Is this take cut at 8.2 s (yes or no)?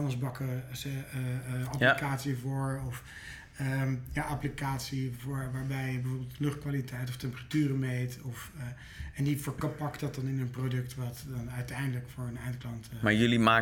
no